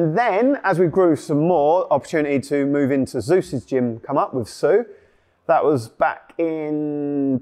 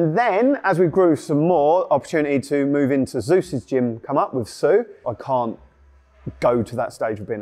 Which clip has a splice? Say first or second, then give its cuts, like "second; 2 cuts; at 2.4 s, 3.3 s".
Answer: second; 1 cut; at 5.0 s